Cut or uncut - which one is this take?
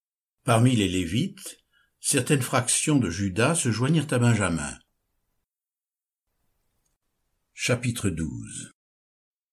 uncut